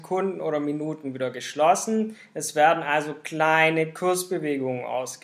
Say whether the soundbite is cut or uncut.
uncut